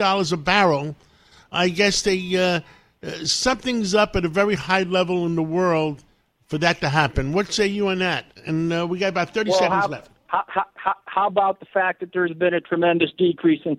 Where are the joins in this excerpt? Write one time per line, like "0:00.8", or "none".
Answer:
none

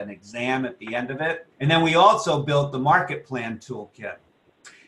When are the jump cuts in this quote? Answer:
0:01.5

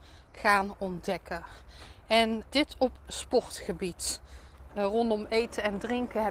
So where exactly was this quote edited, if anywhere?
0:02.5
0:04.7

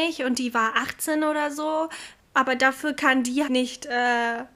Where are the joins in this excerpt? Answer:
0:02.2
0:03.5

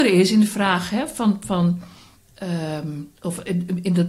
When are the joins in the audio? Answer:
0:03.2

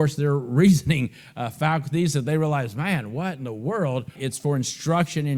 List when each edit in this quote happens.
0:04.2

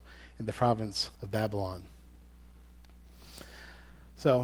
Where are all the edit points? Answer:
0:01.2

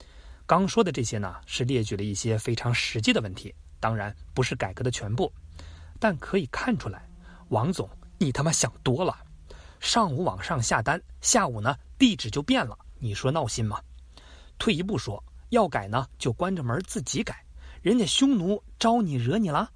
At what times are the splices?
0:09.8

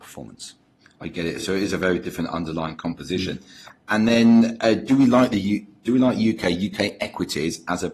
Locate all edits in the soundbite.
none

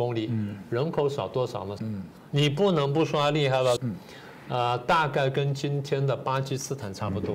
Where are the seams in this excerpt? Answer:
0:01.8
0:03.8

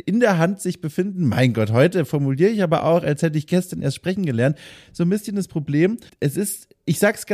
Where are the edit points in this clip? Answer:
0:06.1

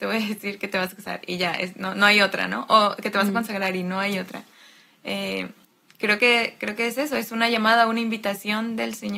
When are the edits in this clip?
none

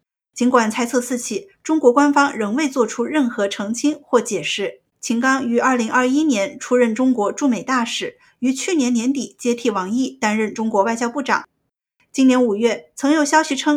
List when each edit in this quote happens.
0:04.9

